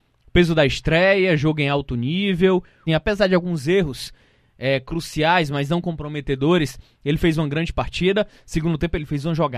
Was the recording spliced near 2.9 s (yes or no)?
yes